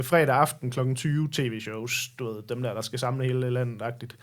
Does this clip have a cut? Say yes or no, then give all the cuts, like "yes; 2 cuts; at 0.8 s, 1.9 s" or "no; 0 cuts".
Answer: no; 0 cuts